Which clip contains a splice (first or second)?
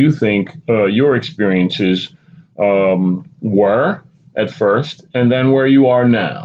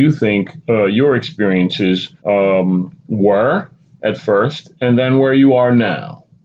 second